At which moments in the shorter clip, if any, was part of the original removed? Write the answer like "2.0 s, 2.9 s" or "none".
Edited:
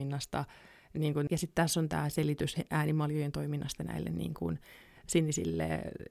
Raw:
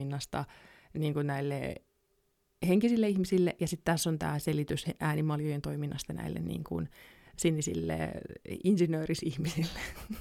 1.3 s